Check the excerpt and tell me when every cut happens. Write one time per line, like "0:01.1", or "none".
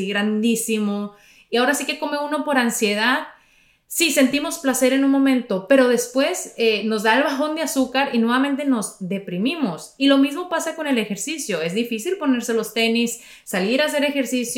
none